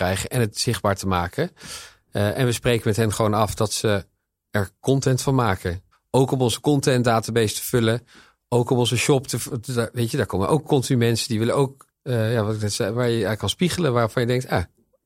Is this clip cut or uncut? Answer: cut